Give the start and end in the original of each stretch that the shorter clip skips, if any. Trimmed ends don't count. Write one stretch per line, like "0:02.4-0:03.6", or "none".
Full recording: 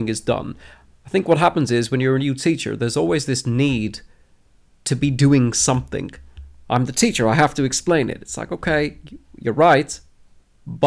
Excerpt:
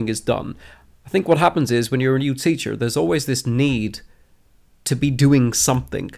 none